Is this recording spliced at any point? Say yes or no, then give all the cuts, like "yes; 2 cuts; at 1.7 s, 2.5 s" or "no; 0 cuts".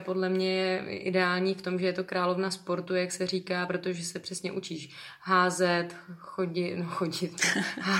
no; 0 cuts